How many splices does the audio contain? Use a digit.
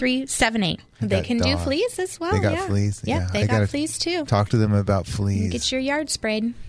1